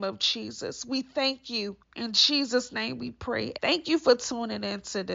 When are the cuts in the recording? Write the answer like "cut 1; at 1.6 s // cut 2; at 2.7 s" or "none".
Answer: cut 1; at 1.8 s // cut 2; at 3.6 s